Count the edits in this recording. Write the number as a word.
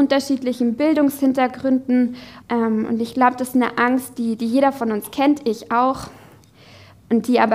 one